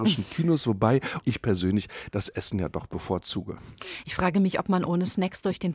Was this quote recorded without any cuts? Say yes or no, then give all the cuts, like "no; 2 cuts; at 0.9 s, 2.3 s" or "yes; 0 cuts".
no; 1 cut; at 1.2 s